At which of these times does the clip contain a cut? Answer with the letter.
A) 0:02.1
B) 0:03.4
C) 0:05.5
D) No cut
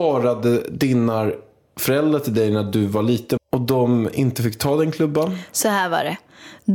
B